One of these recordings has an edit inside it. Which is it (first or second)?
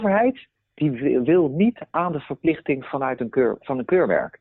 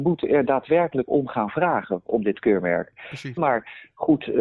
second